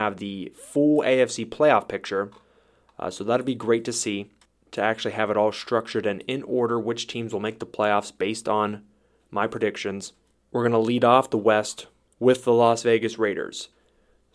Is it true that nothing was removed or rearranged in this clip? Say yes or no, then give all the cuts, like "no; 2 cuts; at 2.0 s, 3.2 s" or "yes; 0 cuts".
yes; 0 cuts